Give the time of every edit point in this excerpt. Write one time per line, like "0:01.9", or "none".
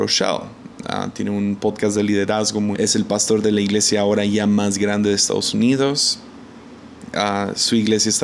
0:02.7